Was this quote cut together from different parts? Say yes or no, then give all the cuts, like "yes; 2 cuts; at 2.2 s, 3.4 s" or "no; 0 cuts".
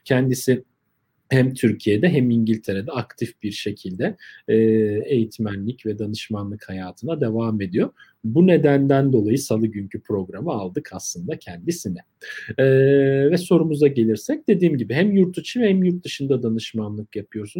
no; 0 cuts